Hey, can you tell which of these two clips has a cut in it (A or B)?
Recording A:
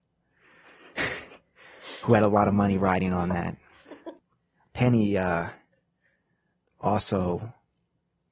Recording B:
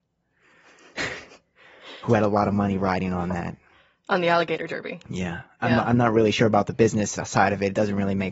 A